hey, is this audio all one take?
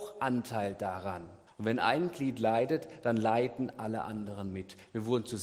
no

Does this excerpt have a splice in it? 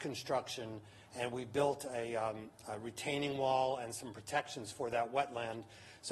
no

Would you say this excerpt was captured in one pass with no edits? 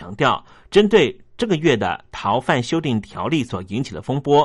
yes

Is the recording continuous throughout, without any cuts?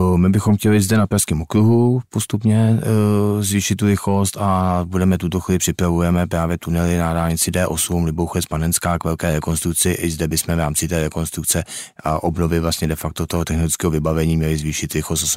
yes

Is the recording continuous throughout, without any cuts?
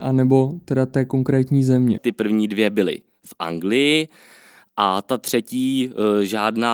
no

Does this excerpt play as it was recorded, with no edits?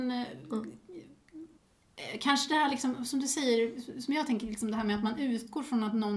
yes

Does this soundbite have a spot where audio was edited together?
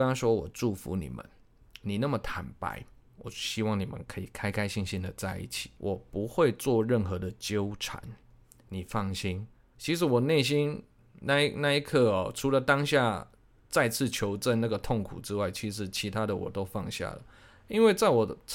yes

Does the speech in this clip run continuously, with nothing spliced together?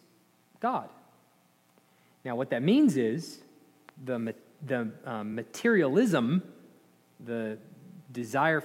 yes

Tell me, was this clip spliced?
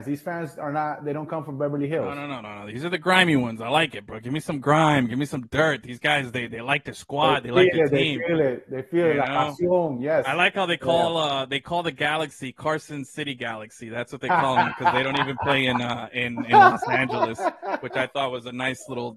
no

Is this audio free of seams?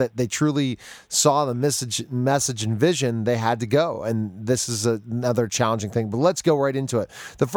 yes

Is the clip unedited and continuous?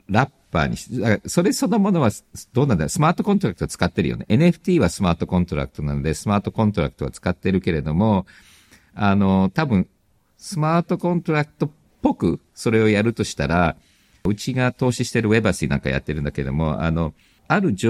yes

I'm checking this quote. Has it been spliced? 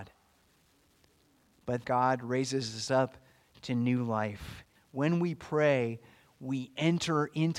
yes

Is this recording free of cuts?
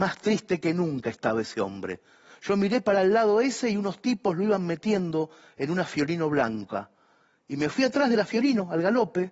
yes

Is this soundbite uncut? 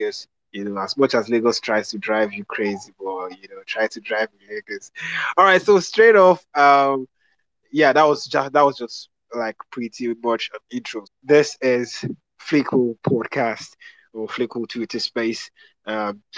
no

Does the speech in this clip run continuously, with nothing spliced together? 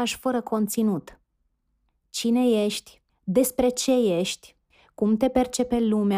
no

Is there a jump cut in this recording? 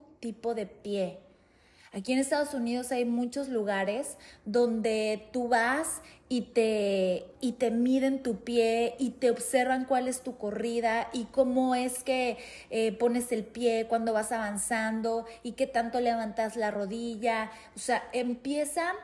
no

